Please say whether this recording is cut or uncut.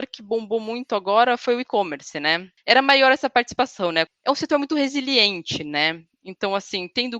cut